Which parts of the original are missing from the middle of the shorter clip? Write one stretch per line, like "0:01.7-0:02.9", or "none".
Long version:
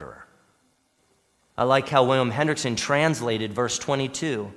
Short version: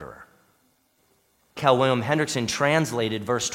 0:01.6-0:01.9

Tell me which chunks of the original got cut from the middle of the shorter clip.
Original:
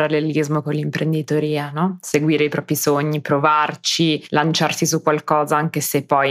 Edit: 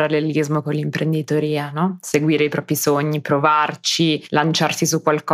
none

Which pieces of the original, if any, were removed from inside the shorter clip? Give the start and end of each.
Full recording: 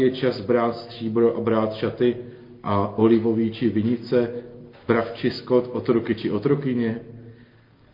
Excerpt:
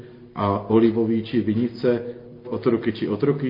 0:04.7-0:05.7

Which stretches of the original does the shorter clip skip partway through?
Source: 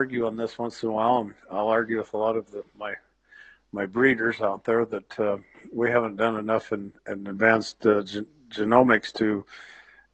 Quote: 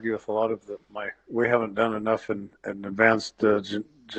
0:03.1-0:05.7

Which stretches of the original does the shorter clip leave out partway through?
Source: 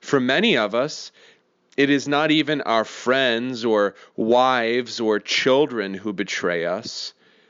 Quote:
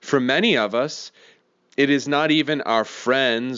none

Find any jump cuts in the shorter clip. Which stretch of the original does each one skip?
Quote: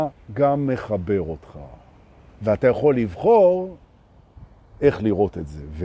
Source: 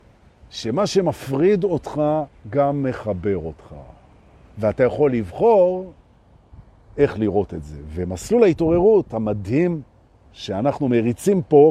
none

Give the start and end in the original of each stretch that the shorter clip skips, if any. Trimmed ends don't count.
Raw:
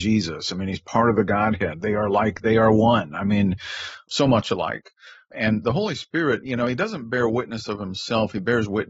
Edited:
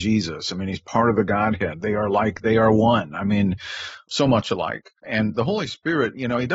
0:05.0-0:05.2

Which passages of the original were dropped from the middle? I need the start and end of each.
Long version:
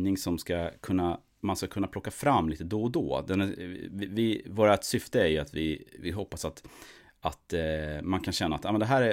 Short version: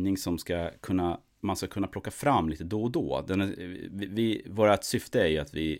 none

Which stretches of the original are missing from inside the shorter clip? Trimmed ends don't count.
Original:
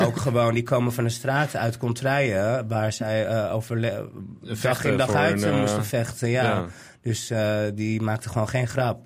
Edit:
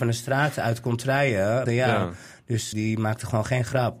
0:02.6-0:06.2
0:07.3-0:07.8

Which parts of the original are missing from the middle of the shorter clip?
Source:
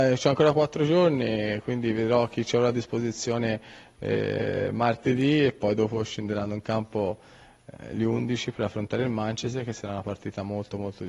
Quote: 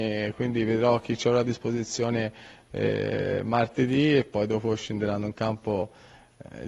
none

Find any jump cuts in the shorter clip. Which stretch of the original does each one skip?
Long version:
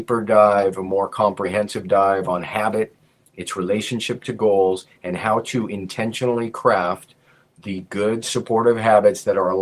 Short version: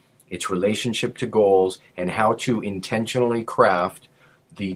none

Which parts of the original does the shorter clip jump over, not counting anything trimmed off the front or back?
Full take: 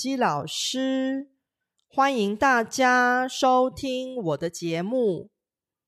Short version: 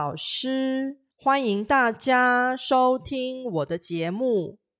0:01.4-0:01.8

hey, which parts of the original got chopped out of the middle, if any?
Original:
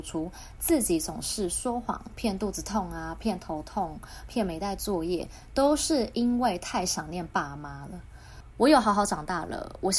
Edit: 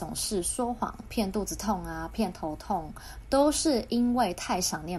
0:04.3-0:05.5

